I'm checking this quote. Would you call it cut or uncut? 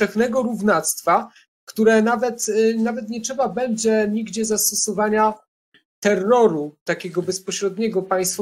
uncut